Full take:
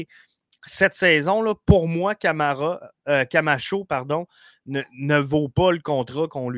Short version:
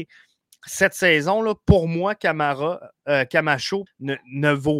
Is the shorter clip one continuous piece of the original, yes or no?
no